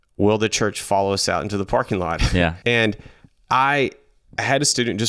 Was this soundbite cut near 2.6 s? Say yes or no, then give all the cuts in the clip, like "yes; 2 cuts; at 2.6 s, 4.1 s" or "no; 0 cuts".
yes; 1 cut; at 2.6 s